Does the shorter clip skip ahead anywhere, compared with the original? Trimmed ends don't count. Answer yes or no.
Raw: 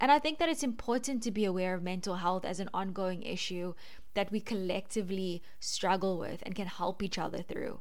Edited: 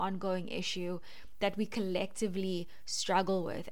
no